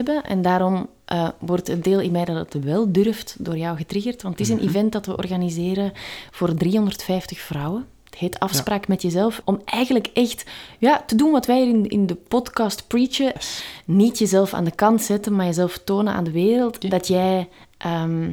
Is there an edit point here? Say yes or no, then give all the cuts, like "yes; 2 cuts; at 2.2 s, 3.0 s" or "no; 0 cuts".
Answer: yes; 3 cuts; at 9.4 s, 13.4 s, 16.8 s